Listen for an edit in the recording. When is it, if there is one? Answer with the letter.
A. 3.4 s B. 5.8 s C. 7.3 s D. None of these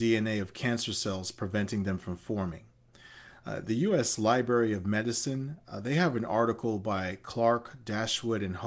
D